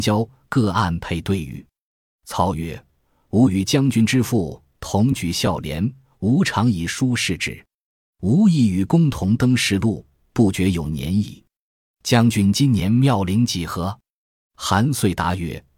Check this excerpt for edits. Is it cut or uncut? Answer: uncut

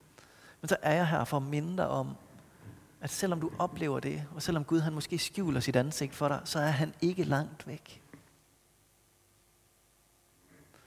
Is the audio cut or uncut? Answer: uncut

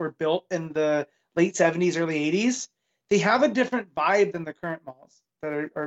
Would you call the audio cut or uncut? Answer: uncut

